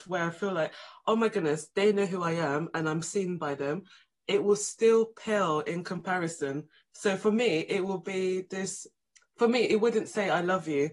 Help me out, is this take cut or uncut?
uncut